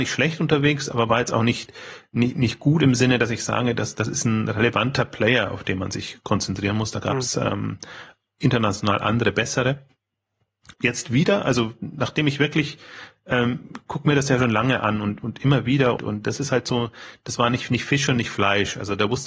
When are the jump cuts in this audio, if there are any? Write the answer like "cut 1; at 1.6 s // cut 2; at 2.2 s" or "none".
cut 1; at 10.7 s // cut 2; at 16.0 s